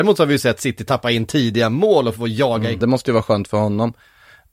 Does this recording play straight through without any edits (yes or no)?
no